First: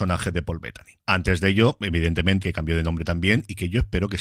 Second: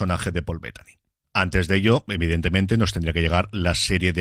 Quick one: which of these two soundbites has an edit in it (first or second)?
first